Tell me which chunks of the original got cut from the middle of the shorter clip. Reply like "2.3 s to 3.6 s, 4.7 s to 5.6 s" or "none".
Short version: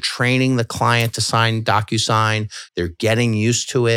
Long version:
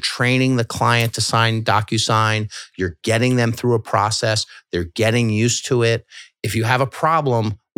2.7 s to 4.6 s

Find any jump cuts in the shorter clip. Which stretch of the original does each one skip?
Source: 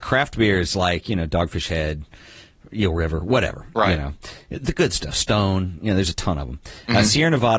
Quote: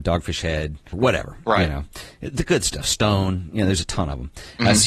2.2 s to 3.2 s

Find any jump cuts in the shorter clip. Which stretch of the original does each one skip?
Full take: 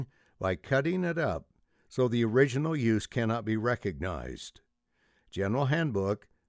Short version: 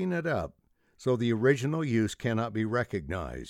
none

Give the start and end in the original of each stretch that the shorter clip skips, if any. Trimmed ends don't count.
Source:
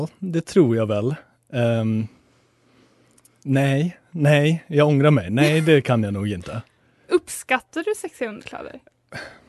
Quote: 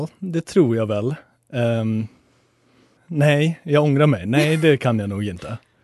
3.0 s to 4.0 s

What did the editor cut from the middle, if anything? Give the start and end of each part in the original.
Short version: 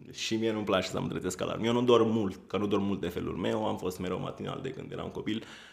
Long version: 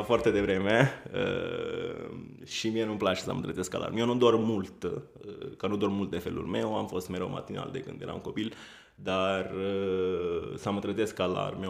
4.8 s to 5.6 s

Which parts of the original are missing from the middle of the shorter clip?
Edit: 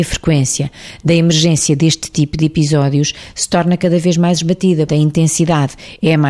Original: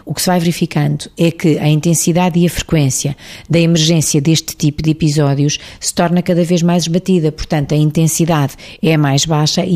7.3 s to 7.7 s

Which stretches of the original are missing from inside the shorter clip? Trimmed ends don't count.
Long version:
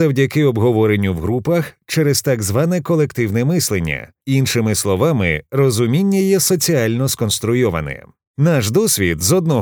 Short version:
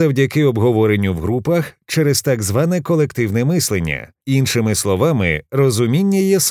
none

